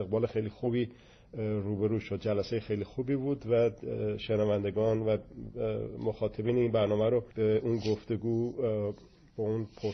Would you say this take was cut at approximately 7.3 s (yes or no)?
yes